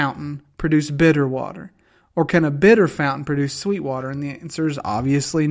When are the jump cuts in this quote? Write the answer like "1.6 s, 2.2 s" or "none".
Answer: none